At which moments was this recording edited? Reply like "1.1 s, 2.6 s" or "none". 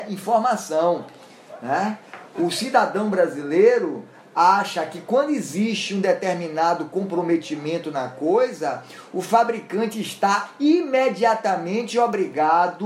none

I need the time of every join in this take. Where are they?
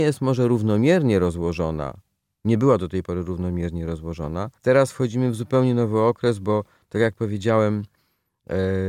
4.5 s

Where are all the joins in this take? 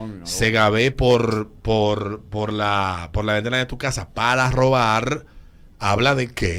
none

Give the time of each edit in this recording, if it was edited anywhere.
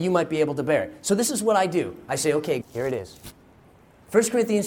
2.6 s

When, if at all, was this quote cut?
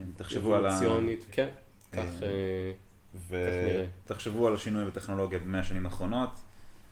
1.3 s, 4.0 s

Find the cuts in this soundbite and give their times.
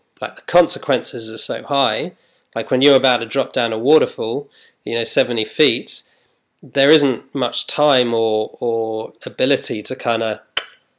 none

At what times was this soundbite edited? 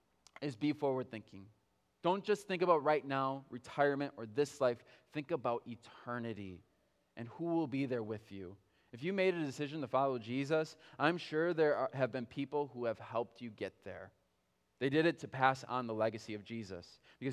none

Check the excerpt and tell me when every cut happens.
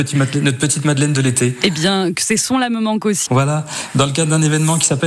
2.1 s, 3.3 s

